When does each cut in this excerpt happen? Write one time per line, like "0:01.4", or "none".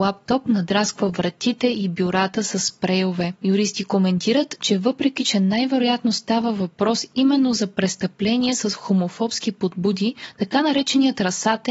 0:03.4

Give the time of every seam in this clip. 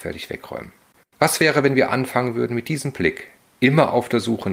0:01.0

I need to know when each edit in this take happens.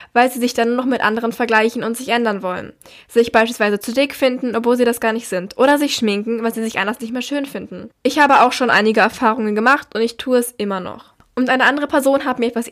none

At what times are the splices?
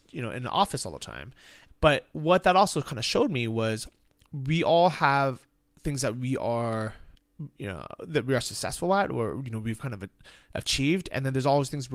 0:01.7

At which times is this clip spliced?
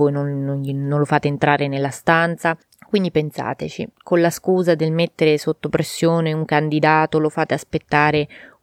0:02.7
0:03.9

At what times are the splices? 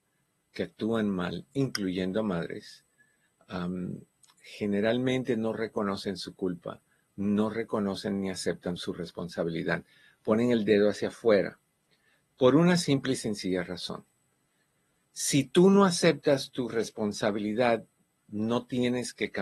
0:08.8

